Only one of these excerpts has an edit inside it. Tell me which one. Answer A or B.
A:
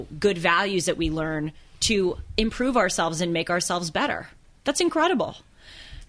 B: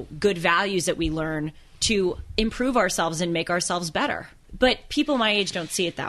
B